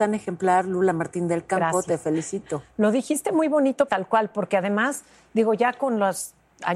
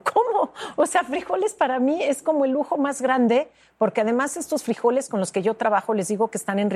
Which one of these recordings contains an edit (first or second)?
first